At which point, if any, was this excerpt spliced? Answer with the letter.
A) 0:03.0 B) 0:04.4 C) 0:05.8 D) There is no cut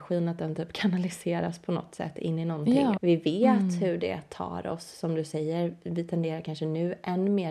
A